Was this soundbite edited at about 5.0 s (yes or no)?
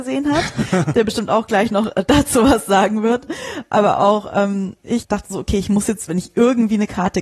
yes